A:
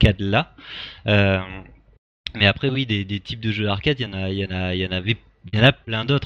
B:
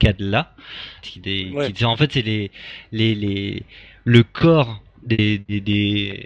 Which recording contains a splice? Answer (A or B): B